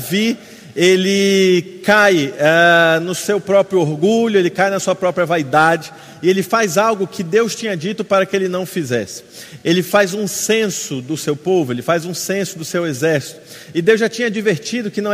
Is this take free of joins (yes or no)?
yes